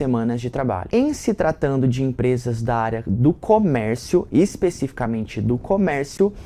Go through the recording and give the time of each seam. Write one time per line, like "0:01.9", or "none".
0:00.9